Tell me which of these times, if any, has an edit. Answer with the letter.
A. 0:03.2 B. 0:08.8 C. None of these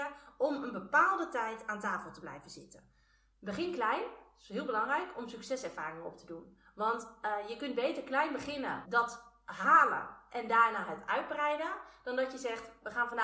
B